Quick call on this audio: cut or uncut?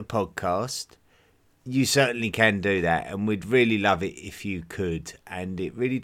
uncut